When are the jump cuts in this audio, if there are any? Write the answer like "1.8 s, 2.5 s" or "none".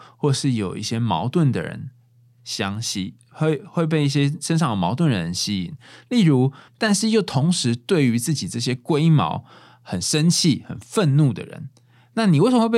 6.7 s